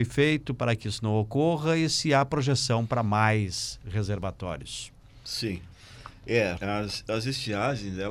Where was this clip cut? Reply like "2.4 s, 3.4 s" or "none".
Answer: 6.6 s